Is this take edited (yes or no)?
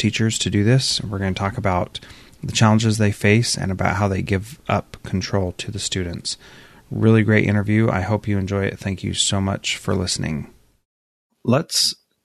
no